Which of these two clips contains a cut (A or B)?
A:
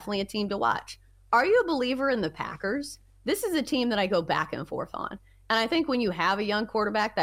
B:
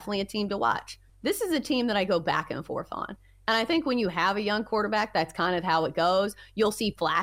B